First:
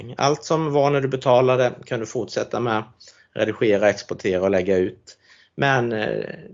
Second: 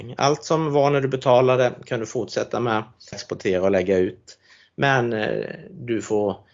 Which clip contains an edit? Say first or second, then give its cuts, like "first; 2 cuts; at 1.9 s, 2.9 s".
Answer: second; 1 cut; at 3.1 s